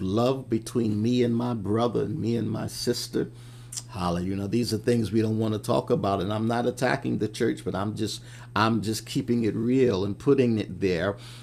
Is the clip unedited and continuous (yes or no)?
yes